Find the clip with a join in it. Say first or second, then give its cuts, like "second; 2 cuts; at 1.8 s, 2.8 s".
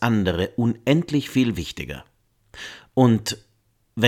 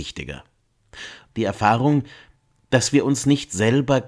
second; 1 cut; at 1.3 s